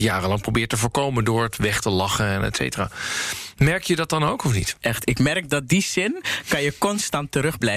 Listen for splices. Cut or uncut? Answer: cut